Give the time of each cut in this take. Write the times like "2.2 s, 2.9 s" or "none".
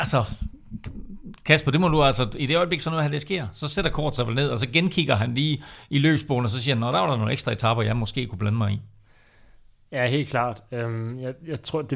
none